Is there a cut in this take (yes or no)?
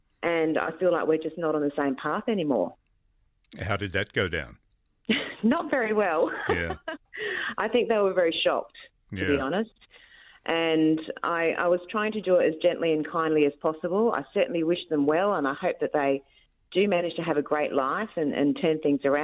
no